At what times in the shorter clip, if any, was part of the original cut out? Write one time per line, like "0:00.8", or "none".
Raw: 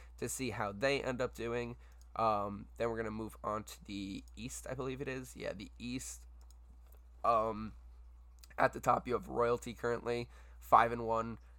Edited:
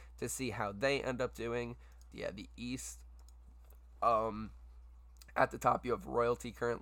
0:02.1